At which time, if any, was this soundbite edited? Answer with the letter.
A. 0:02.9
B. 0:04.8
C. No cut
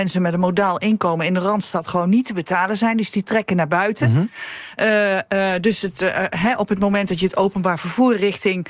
C